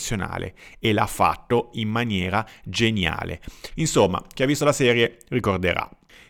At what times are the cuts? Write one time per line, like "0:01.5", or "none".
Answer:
0:03.7